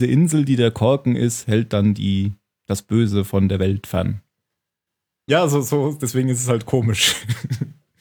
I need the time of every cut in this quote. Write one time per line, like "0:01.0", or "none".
0:05.3